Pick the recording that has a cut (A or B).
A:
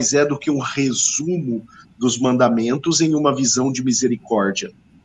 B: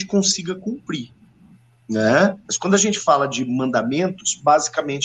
B